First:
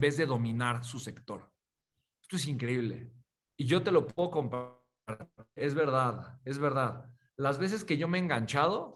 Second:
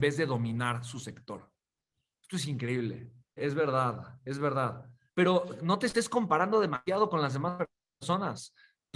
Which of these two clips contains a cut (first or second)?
second